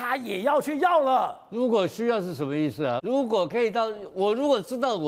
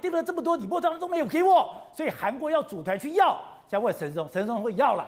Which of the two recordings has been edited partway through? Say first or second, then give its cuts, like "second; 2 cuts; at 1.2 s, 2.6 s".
first; 1 cut; at 3.0 s